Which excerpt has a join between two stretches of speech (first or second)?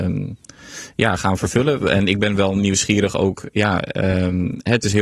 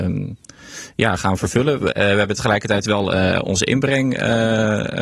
second